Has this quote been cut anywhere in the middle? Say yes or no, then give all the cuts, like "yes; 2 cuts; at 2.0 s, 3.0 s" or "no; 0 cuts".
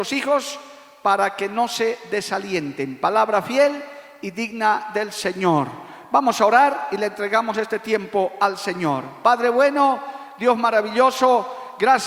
no; 0 cuts